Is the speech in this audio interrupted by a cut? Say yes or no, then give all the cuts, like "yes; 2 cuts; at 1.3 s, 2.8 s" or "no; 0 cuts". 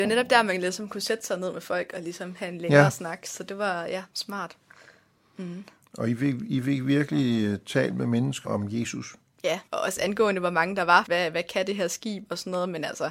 yes; 3 cuts; at 8.4 s, 9.7 s, 11.1 s